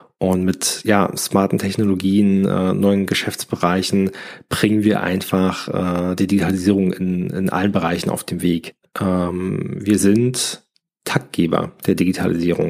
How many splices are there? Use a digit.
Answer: 1